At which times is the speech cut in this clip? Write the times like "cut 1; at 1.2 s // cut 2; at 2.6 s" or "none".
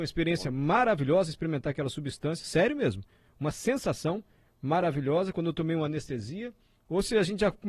none